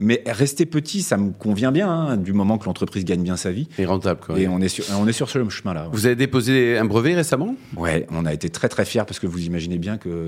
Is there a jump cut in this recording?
no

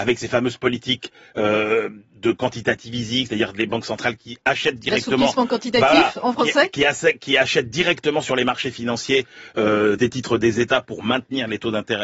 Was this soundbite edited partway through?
yes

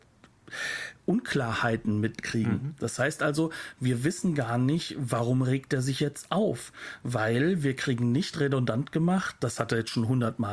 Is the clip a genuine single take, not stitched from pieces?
yes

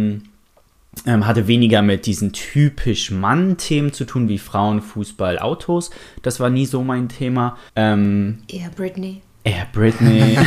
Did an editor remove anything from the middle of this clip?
yes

